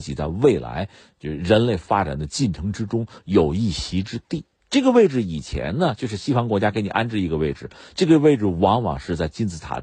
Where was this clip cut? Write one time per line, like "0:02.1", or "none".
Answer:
0:04.6